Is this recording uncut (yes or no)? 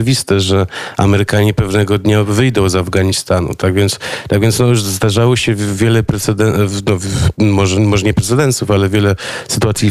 yes